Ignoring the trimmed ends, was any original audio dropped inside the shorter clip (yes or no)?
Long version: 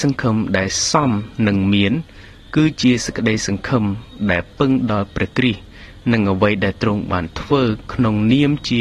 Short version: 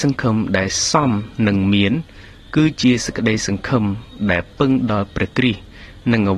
no